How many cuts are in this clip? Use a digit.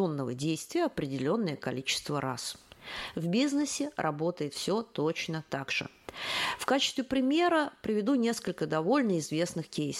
0